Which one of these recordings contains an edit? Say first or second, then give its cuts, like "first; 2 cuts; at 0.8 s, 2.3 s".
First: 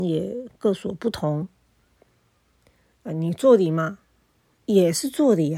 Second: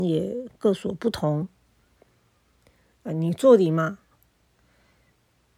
second; 1 cut; at 4.1 s